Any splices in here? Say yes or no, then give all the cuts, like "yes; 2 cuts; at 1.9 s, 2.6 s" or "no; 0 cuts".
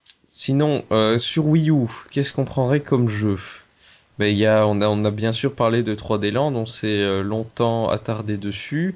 no; 0 cuts